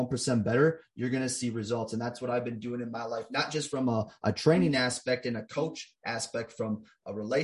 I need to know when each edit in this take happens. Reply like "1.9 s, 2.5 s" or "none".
none